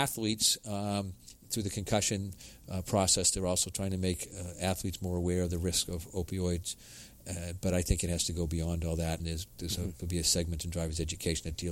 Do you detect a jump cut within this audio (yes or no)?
yes